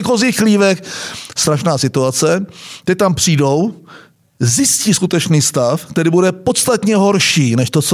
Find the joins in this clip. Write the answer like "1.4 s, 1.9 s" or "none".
none